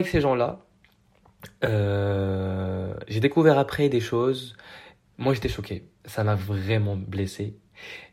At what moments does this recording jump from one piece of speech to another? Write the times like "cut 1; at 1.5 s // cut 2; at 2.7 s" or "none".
cut 1; at 5.1 s